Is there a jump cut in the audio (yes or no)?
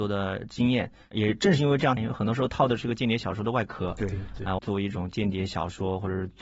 yes